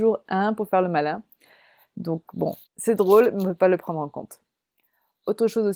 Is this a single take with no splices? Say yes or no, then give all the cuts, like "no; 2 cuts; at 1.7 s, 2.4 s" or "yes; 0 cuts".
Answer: no; 1 cut; at 2.6 s